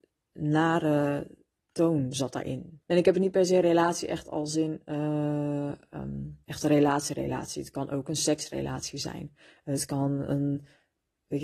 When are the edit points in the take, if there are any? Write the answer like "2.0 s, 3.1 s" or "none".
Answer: 2.8 s, 6.4 s